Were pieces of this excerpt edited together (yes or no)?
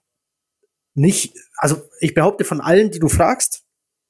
no